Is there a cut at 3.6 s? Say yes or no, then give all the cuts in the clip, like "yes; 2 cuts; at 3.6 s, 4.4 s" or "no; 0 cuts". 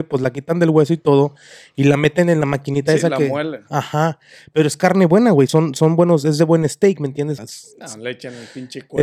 no; 2 cuts; at 5.5 s, 7.4 s